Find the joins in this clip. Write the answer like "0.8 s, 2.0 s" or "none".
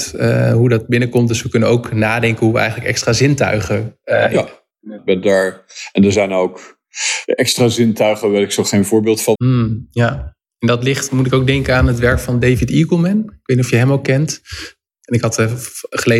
5.0 s, 9.3 s, 14.9 s